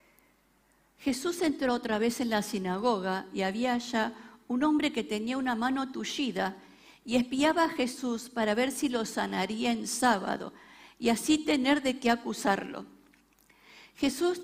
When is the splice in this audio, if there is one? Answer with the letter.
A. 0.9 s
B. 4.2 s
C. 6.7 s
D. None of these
D